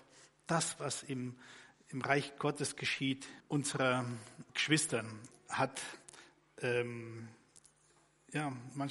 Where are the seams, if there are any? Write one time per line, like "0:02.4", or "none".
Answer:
0:03.4
0:04.5